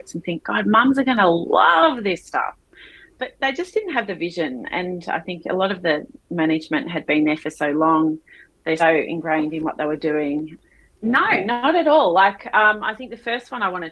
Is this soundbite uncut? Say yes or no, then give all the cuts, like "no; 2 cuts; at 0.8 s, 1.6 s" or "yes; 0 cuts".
no; 2 cuts; at 8.8 s, 10.9 s